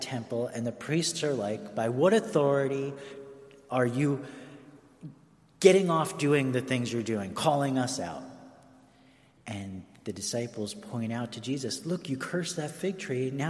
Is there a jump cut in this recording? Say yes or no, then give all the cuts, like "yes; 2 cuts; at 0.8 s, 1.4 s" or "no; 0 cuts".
yes; 1 cut; at 9.4 s